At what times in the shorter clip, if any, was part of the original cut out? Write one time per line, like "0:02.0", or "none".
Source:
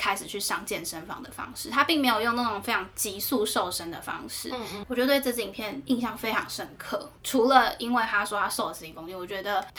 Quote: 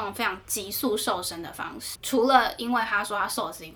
0:02.0